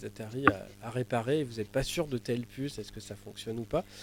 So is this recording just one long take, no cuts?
yes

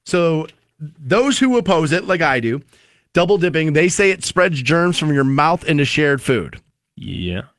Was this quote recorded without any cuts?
yes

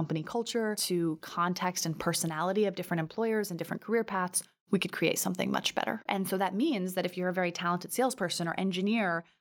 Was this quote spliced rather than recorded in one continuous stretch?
yes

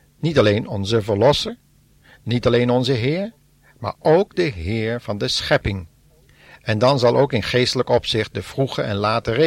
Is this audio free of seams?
yes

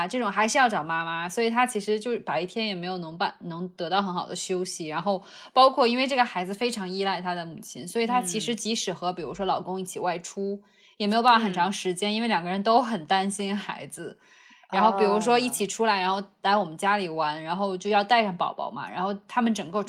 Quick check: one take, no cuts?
yes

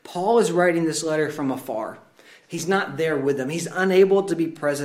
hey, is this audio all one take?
no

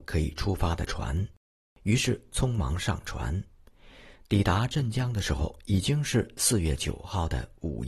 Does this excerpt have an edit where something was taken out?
no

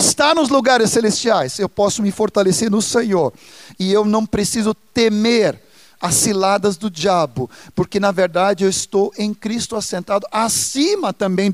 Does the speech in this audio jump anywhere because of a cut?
no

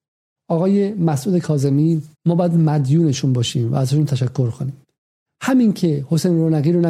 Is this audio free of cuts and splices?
no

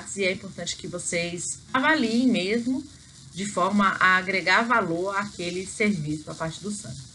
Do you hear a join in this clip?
yes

